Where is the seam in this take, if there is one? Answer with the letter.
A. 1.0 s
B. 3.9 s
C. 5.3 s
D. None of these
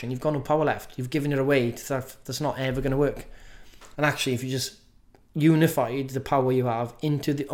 B